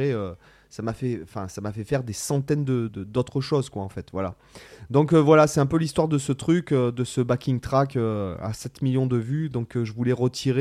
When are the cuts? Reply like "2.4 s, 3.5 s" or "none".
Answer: 2.9 s

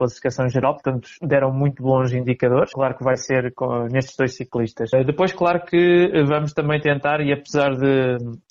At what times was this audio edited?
2.7 s

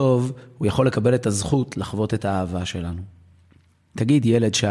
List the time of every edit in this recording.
none

